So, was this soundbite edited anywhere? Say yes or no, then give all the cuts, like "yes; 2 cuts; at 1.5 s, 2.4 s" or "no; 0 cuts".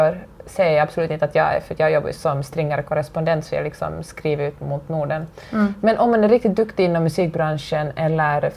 yes; 1 cut; at 2.1 s